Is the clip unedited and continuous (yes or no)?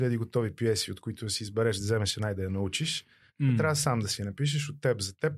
yes